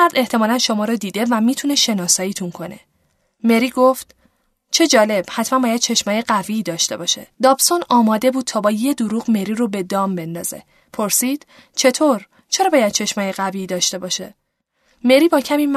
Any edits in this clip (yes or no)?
yes